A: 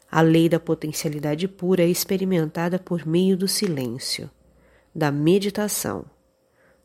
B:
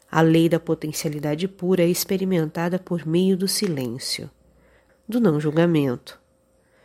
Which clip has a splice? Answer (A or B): B